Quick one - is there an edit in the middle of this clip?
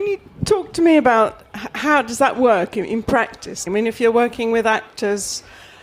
yes; 1 cut; at 3.7 s

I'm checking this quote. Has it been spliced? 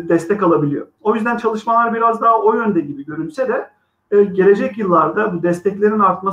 no; 0 cuts

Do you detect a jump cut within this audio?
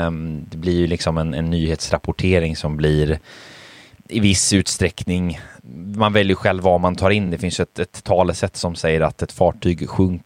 no; 0 cuts

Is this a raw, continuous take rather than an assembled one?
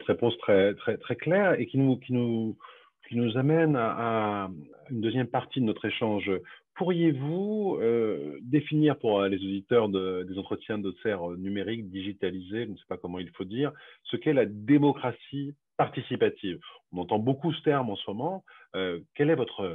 yes; 0 cuts

